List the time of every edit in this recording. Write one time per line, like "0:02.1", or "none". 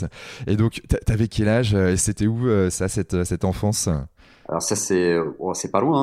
none